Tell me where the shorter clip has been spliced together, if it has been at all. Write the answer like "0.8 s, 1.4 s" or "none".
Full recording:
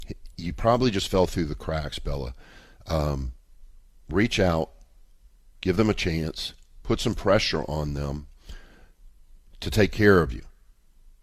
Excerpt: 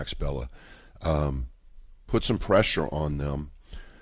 2.1 s

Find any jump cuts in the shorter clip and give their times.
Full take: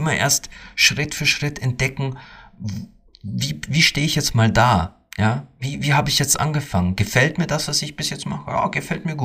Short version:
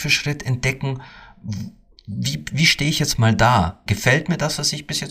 3.9 s

